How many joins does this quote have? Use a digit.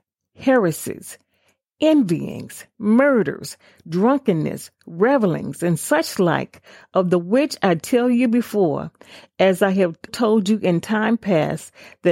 1